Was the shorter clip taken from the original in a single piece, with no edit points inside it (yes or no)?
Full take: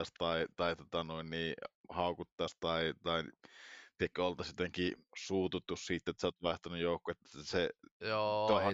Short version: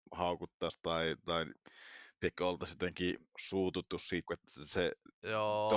no